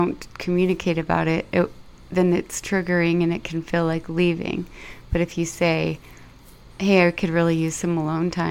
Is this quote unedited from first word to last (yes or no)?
yes